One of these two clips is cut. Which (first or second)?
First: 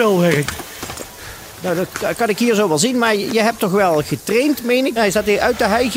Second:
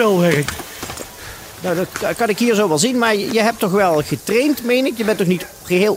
first